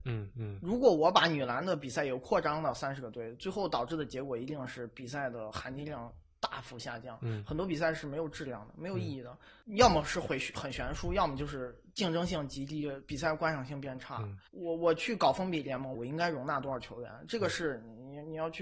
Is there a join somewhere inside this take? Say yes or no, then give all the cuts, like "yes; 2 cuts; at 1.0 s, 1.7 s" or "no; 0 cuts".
yes; 2 cuts; at 14.5 s, 15.9 s